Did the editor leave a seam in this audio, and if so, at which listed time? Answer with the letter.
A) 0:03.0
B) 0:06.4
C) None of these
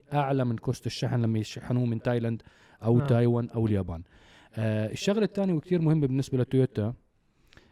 C